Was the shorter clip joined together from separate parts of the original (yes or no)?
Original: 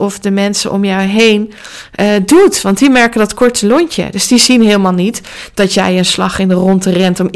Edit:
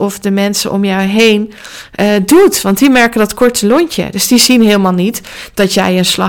no